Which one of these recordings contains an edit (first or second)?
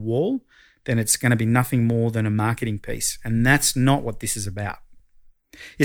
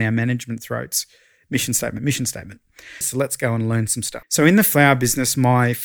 second